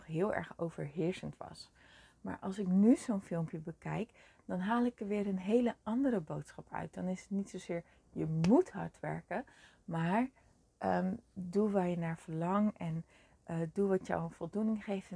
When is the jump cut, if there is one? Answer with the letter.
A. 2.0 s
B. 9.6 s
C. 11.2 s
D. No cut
D